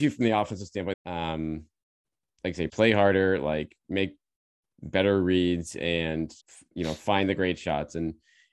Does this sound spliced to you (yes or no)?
yes